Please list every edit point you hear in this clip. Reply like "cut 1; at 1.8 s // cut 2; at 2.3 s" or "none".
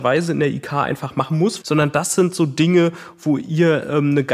cut 1; at 1.6 s